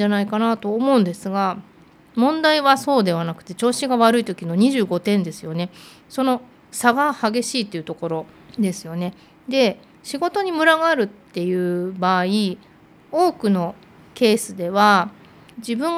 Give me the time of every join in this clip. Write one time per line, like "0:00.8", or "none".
none